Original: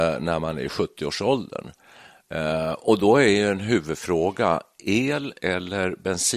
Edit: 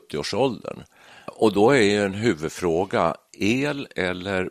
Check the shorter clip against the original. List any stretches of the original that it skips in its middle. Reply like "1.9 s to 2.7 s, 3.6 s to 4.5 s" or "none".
2.2 s to 2.7 s